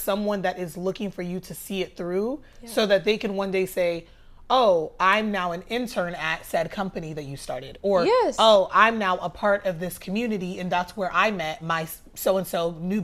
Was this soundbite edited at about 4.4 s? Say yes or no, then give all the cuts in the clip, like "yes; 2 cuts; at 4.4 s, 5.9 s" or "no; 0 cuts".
no; 0 cuts